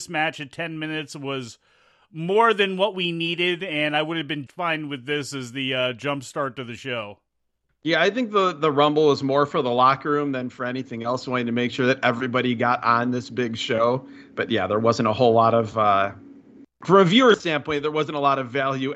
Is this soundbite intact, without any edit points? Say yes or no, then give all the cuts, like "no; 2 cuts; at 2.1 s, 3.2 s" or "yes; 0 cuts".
no; 1 cut; at 4.5 s